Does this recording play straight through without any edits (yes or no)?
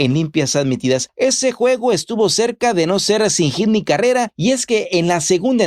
no